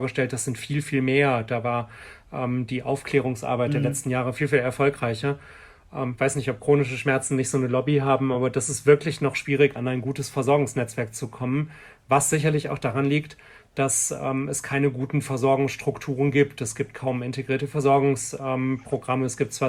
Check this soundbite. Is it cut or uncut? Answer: uncut